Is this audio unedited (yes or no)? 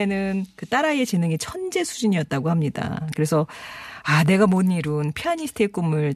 yes